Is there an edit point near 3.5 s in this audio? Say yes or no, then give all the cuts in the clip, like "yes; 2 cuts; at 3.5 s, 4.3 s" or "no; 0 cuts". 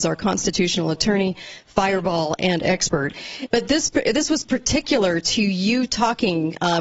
yes; 1 cut; at 3.5 s